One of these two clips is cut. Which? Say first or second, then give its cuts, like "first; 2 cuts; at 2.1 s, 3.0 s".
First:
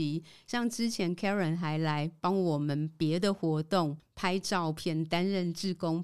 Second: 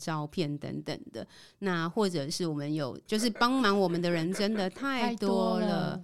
second; 1 cut; at 3.1 s